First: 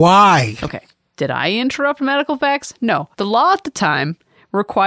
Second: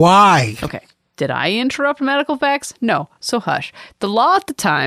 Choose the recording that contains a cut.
first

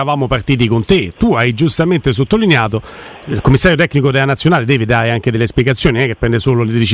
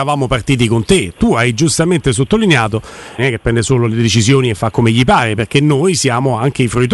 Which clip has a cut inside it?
second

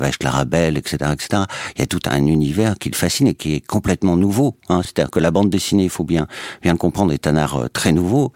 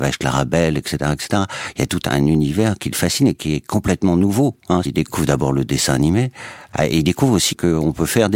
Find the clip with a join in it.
second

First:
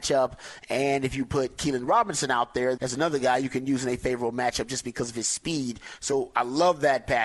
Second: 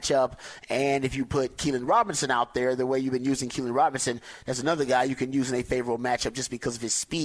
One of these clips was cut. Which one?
first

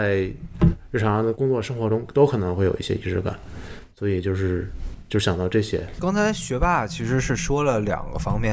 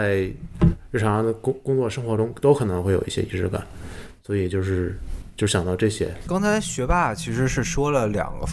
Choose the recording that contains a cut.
first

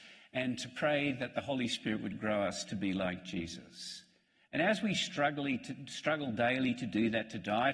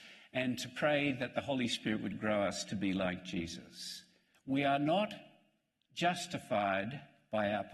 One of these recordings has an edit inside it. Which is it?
second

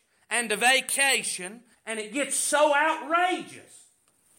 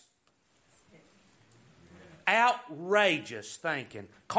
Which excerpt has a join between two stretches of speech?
first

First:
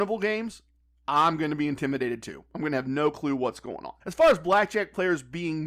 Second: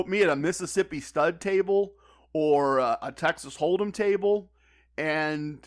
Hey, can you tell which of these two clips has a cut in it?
first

